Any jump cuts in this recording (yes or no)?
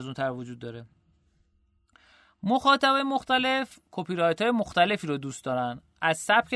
no